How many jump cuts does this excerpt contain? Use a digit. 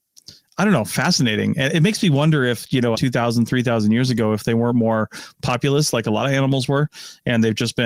1